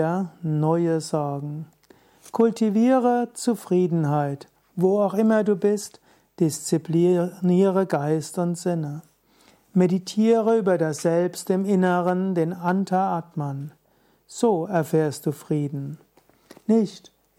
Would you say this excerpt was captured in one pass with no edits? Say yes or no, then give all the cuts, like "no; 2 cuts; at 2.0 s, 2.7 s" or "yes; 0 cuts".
yes; 0 cuts